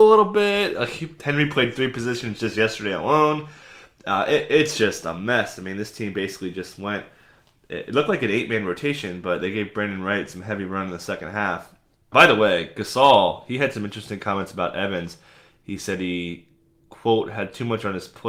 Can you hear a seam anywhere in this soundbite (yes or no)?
yes